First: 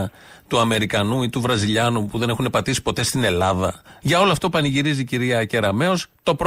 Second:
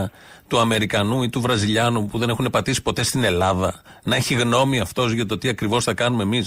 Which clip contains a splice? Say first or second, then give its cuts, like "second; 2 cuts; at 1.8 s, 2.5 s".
first; 1 cut; at 4.0 s